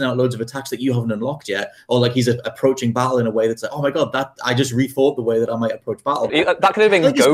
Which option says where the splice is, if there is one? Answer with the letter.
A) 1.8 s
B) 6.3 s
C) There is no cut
B